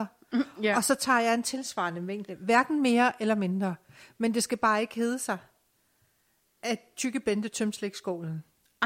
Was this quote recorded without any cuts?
yes; 0 cuts

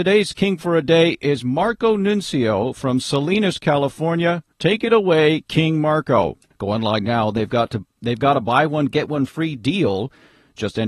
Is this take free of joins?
no; 2 cuts; at 4.5 s, 6.5 s

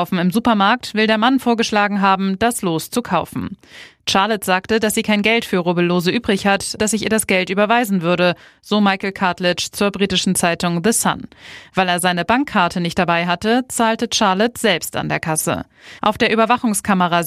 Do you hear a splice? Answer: yes; 2 cuts; at 6.8 s, 16.0 s

